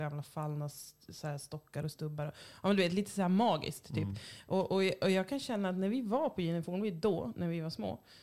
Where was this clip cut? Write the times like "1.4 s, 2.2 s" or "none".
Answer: none